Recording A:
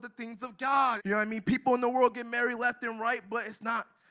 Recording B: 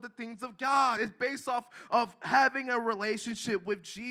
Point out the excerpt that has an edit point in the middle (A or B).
A